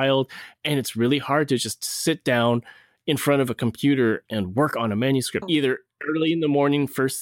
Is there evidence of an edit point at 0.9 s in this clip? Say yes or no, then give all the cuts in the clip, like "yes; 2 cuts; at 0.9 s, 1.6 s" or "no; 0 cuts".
no; 2 cuts; at 4.3 s, 5.4 s